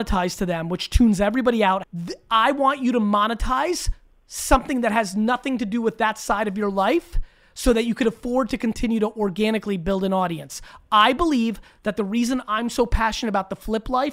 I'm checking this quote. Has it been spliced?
yes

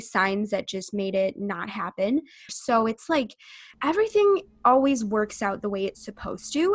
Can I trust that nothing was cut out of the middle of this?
no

